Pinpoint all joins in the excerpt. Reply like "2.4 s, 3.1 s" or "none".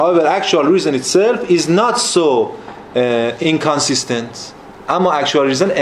none